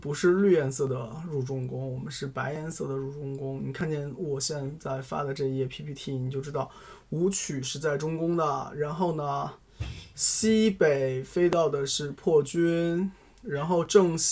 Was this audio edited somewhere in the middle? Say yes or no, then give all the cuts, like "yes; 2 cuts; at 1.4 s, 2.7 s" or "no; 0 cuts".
no; 0 cuts